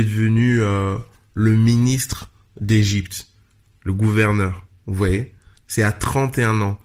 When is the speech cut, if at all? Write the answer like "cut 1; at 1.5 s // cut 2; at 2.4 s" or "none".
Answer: none